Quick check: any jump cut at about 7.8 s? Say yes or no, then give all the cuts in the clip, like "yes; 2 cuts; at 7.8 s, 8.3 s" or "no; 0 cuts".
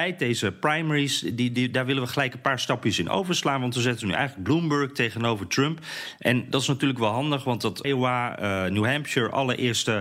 yes; 1 cut; at 7.8 s